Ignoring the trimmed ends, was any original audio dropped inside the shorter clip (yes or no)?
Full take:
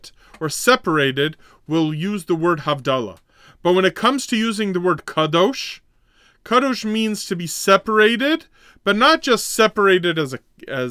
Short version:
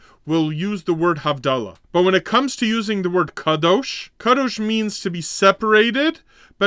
yes